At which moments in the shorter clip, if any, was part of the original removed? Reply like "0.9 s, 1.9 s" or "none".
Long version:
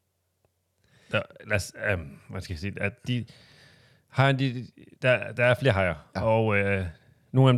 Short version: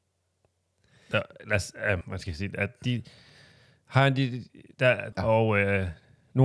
2.0 s, 5.1 s